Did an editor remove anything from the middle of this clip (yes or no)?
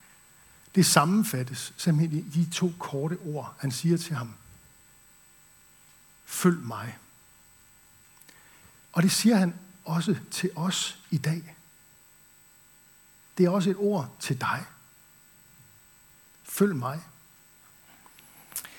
no